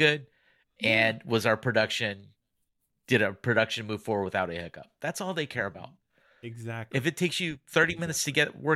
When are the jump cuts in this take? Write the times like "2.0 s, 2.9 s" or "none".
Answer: none